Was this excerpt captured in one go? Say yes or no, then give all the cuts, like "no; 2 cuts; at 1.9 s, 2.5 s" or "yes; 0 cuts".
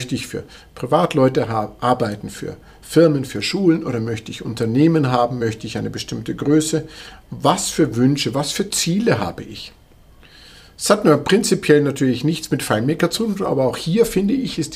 yes; 0 cuts